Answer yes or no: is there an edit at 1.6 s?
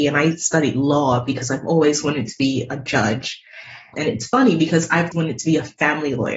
no